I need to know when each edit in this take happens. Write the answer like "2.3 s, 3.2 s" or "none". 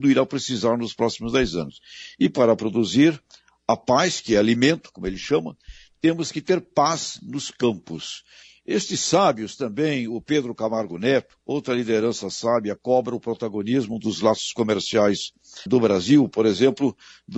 11.4 s, 15.7 s